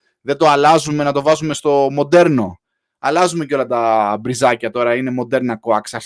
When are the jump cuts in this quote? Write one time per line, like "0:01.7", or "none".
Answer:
none